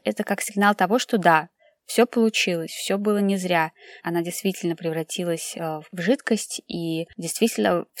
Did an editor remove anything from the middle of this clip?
yes; 1 cut; at 4.0 s

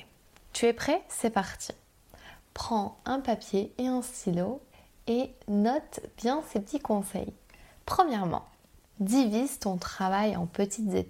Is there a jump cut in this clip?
no; 0 cuts

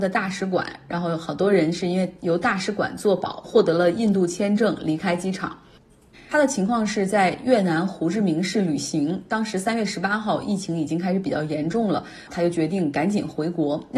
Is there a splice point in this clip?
yes; 2 cuts; at 6.1 s, 12.3 s

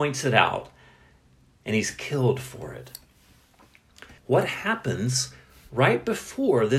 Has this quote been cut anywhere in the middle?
yes; 1 cut; at 4.2 s

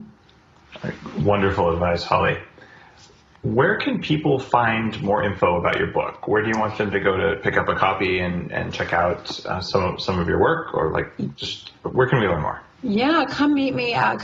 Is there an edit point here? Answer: no; 0 cuts

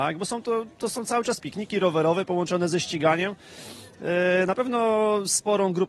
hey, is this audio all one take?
no; 1 cut; at 1.4 s

